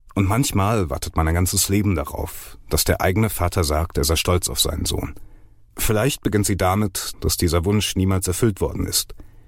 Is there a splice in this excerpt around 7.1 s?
yes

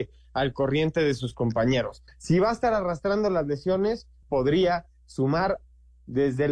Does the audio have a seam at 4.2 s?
yes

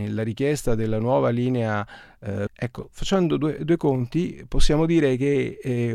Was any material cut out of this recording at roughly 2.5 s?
yes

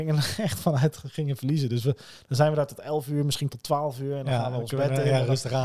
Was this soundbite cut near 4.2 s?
no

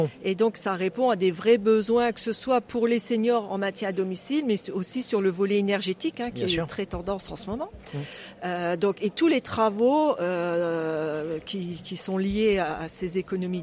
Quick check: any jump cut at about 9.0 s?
no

